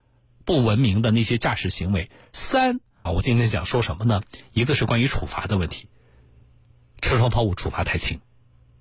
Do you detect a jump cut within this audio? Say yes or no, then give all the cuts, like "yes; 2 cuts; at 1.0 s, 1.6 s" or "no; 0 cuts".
yes; 1 cut; at 3.1 s